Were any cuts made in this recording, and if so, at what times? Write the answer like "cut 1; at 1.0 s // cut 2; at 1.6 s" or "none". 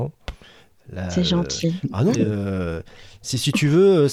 cut 1; at 2.1 s